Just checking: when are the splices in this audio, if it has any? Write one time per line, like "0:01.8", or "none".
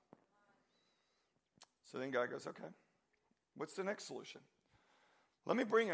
none